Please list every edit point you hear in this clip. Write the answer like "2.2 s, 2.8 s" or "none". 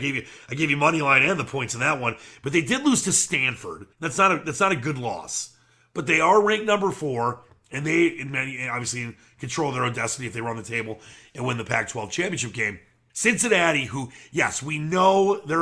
3.9 s, 13.1 s